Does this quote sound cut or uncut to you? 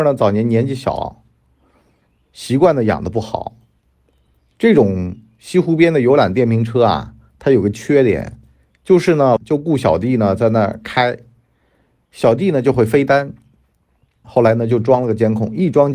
cut